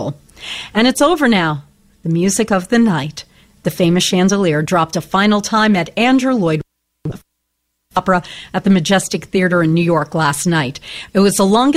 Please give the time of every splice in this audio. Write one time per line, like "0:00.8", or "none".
none